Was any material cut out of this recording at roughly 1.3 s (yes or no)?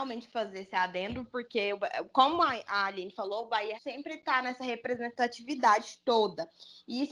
no